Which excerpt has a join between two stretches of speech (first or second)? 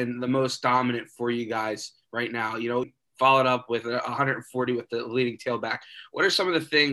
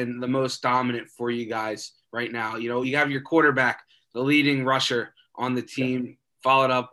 first